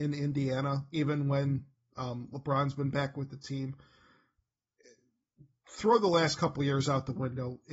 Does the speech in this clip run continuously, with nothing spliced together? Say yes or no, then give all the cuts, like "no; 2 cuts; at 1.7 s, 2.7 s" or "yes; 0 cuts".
yes; 0 cuts